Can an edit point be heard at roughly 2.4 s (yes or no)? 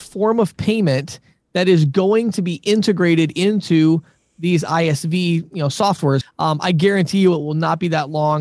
no